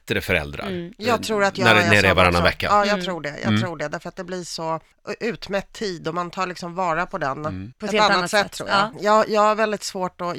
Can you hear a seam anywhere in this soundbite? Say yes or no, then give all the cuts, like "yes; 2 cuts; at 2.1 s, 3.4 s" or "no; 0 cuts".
yes; 2 cuts; at 7.7 s, 8.9 s